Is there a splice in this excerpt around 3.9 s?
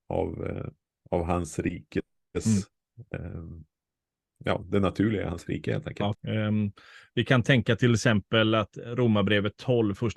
no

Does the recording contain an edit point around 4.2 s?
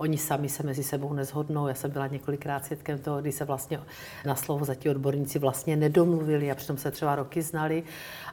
yes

